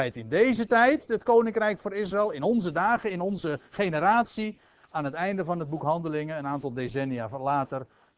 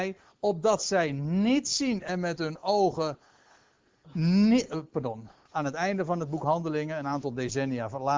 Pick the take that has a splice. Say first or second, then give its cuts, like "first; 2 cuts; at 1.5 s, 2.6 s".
second; 1 cut; at 5.5 s